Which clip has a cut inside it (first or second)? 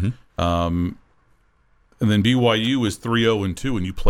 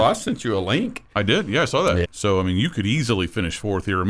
second